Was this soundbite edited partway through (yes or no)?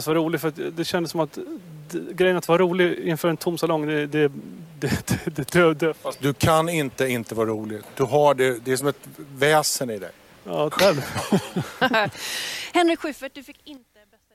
yes